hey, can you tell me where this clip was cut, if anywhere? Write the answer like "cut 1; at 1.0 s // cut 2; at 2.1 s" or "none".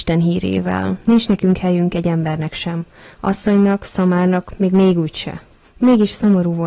cut 1; at 5.6 s

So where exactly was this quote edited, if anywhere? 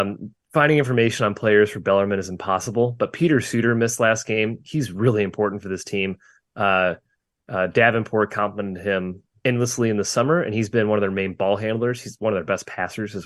none

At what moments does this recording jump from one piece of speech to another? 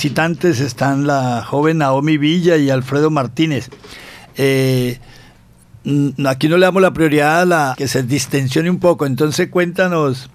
cut 1; at 7.7 s

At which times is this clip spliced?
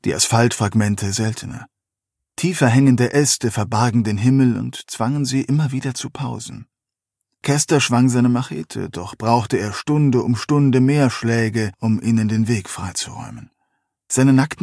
none

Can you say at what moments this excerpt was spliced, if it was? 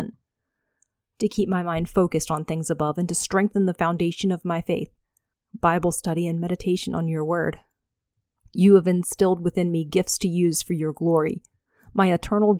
cut 1; at 5.3 s // cut 2; at 8.4 s

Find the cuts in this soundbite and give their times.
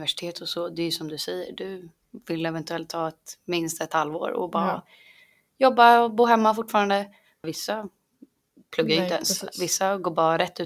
cut 1; at 7.4 s

